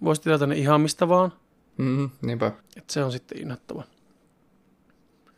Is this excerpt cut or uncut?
cut